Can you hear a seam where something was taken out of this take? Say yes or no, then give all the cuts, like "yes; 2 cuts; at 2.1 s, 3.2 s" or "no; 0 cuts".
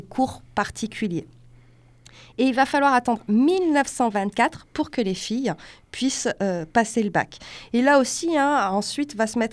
no; 0 cuts